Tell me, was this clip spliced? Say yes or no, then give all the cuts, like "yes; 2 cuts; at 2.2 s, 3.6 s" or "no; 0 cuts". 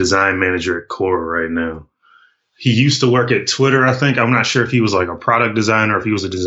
no; 0 cuts